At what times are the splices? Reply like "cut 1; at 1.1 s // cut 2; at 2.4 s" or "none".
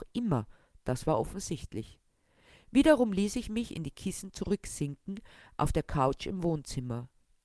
none